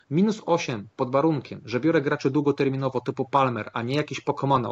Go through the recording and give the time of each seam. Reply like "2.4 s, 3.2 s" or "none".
none